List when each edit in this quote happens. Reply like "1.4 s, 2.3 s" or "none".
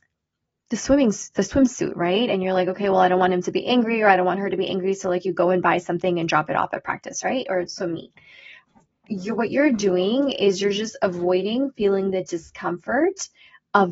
none